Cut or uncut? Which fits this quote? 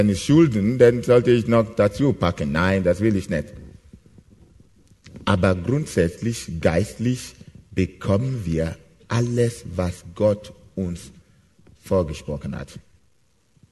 uncut